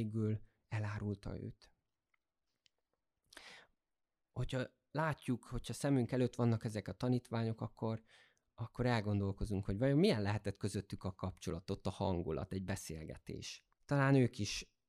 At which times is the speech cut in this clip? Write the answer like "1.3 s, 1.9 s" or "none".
13.7 s